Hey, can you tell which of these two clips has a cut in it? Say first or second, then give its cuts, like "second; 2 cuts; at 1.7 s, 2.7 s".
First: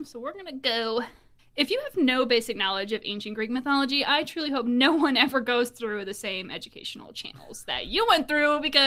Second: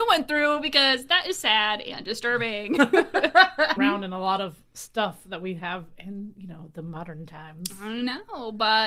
second; 1 cut; at 3.8 s